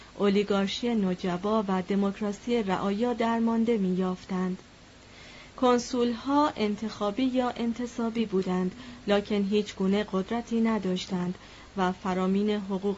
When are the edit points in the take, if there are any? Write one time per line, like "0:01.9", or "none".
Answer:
0:05.5